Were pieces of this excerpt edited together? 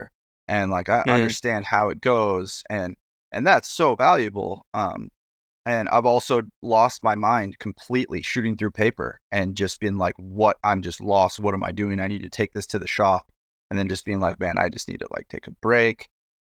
no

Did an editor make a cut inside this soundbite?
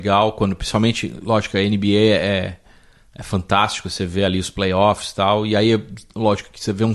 no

